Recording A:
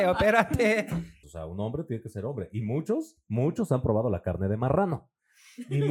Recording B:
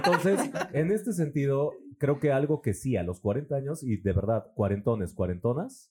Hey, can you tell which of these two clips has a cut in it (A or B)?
A